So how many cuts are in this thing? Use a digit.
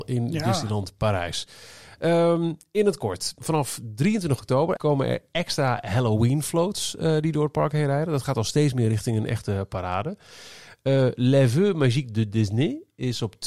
2